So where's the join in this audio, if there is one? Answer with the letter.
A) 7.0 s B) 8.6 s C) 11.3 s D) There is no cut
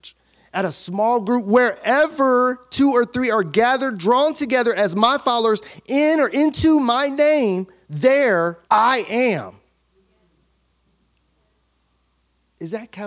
B